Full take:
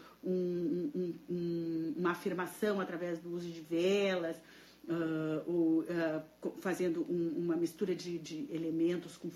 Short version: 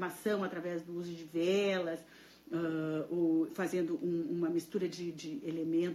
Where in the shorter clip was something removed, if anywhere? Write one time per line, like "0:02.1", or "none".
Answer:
0:03.5